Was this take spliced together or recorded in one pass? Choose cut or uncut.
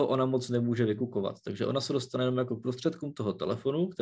uncut